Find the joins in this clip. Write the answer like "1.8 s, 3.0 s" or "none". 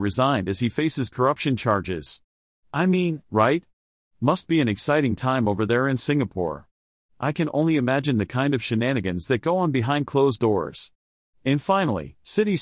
3.2 s